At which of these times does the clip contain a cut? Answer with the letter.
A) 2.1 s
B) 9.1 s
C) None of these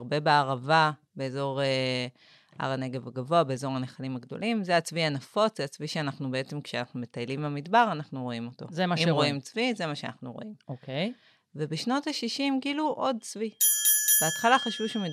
C